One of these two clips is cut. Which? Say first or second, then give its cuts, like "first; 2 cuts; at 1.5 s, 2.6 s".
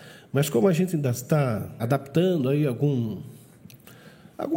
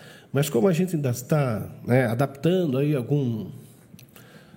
first; 1 cut; at 1.8 s